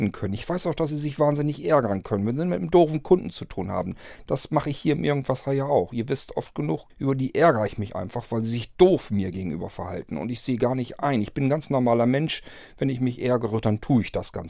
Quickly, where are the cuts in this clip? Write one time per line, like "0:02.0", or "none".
0:06.9